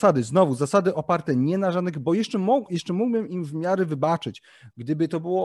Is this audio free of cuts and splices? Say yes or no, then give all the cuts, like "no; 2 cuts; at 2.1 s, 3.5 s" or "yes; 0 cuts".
yes; 0 cuts